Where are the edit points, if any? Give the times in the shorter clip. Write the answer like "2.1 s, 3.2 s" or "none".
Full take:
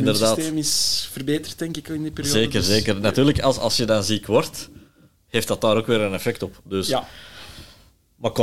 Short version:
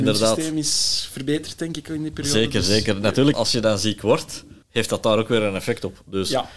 3.3 s, 4.6 s